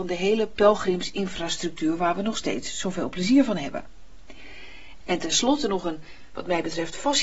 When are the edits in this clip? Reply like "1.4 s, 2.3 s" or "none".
5.0 s